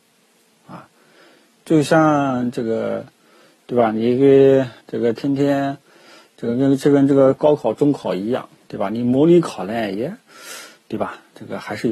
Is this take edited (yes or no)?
yes